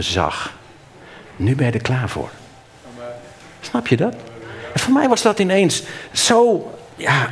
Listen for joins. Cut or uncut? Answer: uncut